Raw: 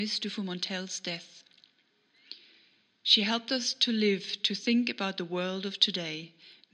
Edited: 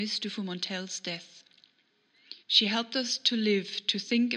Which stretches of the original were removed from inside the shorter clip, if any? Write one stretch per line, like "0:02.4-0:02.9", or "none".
0:02.4-0:03.0